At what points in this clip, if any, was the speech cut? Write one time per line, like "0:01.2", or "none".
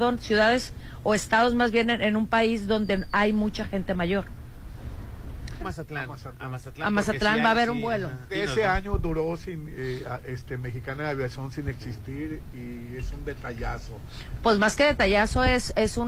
0:05.6
0:08.3